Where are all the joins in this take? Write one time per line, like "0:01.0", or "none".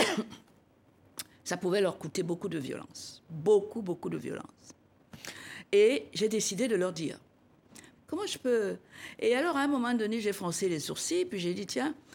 0:08.0